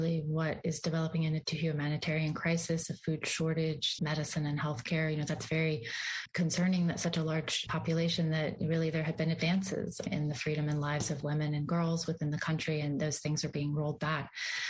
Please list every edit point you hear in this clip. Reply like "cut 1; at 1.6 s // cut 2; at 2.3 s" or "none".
cut 1; at 4.0 s